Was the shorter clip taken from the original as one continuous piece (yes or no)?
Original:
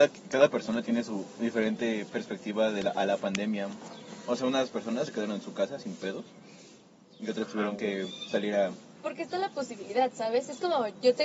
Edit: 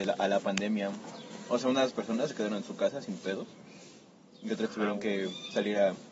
yes